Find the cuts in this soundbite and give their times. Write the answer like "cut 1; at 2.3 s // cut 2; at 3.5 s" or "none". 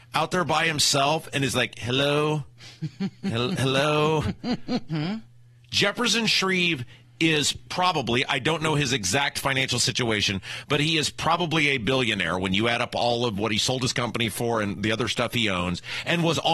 cut 1; at 4.9 s